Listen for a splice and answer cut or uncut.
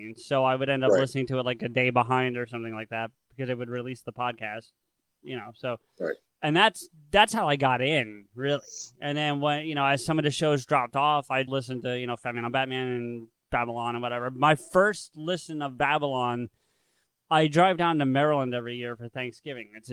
cut